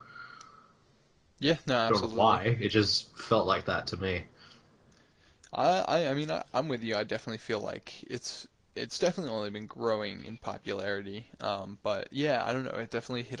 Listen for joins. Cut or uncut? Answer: uncut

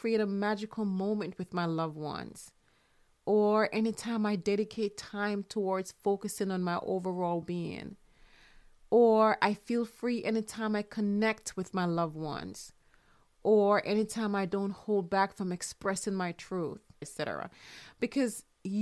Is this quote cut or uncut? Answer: cut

